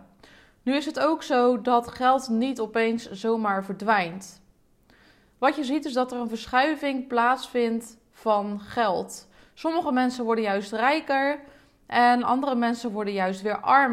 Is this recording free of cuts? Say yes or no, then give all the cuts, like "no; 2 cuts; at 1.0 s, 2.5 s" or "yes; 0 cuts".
yes; 0 cuts